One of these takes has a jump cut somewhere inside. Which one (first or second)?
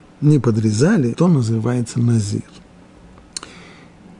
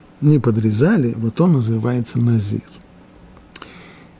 first